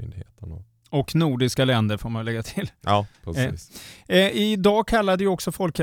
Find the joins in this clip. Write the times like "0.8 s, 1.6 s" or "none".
none